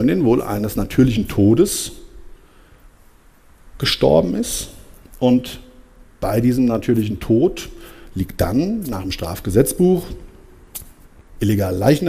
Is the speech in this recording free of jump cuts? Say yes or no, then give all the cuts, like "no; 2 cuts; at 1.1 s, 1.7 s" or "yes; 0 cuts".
yes; 0 cuts